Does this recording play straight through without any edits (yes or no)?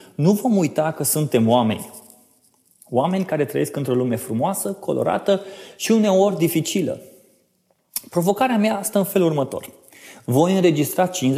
yes